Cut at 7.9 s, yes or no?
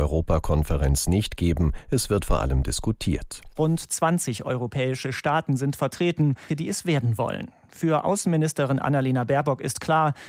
no